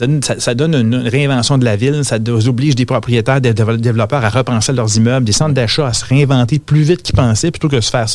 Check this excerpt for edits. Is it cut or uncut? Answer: uncut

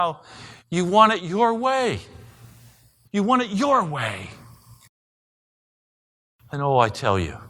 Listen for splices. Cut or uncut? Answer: cut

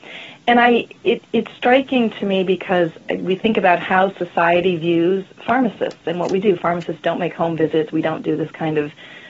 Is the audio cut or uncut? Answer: uncut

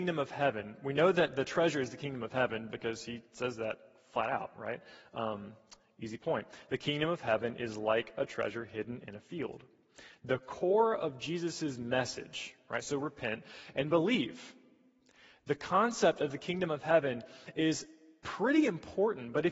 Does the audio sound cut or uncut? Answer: cut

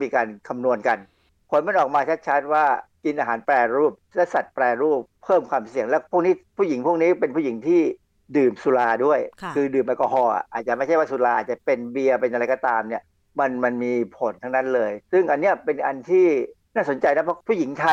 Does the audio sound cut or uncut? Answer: uncut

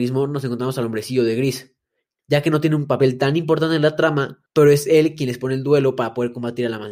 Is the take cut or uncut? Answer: cut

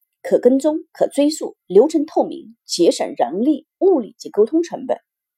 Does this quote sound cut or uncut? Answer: uncut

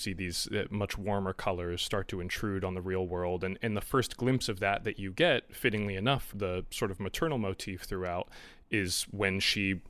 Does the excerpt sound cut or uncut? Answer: cut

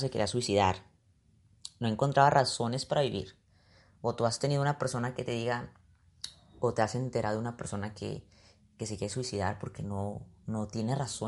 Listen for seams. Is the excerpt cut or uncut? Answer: uncut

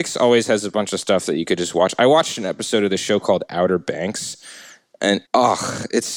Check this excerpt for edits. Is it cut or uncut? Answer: cut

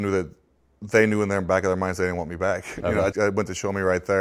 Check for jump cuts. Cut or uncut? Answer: cut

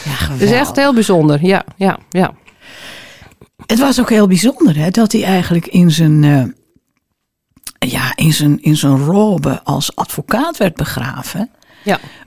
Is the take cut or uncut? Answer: uncut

